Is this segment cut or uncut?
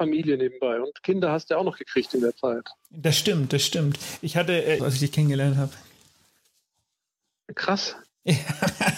cut